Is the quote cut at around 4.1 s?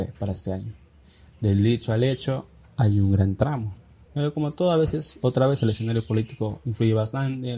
yes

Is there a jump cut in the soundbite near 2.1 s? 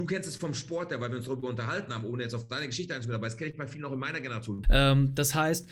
no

